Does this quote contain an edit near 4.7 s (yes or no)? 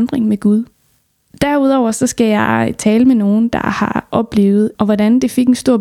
yes